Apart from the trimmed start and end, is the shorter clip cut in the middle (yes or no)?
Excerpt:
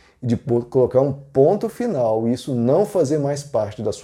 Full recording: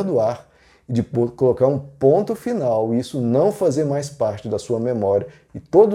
no